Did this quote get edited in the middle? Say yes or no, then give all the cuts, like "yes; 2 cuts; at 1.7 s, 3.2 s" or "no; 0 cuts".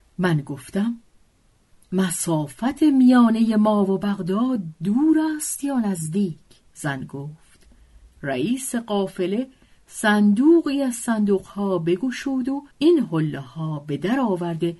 yes; 2 cuts; at 6.6 s, 12.7 s